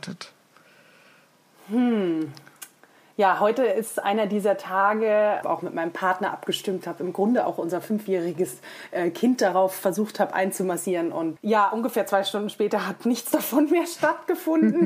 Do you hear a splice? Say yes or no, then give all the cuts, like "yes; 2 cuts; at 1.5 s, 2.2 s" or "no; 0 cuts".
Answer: yes; 2 cuts; at 5.4 s, 11.4 s